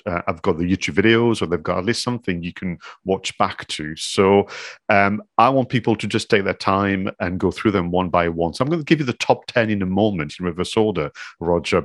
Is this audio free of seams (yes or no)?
yes